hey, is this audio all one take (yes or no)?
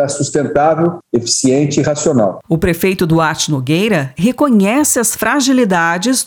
no